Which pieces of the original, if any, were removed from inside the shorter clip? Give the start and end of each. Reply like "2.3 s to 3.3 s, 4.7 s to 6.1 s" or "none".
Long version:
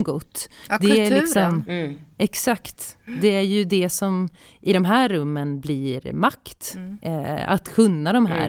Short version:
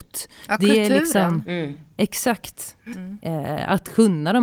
3.1 s to 6.7 s